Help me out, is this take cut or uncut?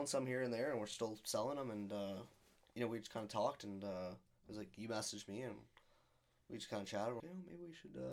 cut